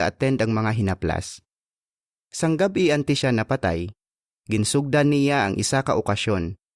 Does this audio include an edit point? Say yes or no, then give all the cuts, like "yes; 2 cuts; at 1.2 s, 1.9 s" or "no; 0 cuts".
yes; 1 cut; at 2.2 s